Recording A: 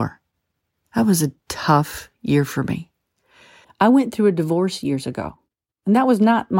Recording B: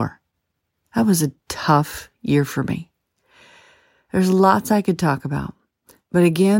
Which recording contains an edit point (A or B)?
A